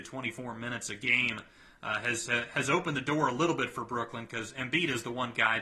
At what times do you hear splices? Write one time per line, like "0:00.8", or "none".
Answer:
none